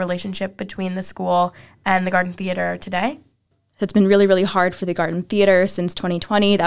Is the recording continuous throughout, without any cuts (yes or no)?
yes